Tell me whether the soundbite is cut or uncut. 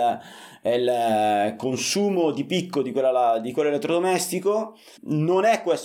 cut